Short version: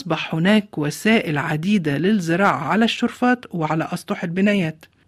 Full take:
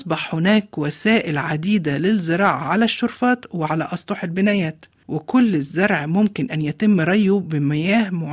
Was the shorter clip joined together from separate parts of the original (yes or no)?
no